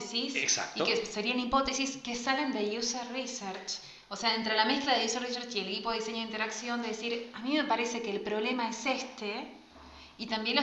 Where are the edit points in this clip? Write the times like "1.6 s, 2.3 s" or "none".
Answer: none